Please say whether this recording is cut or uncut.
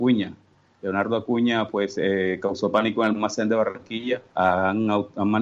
cut